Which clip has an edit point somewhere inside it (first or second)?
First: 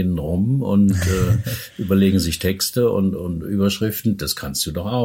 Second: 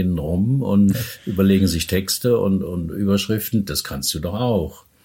second